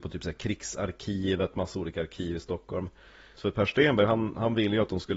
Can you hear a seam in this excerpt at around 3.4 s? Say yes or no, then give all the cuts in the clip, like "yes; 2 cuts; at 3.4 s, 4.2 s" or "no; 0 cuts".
yes; 1 cut; at 3.4 s